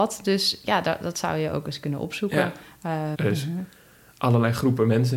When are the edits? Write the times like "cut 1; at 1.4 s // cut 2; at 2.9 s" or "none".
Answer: cut 1; at 3.1 s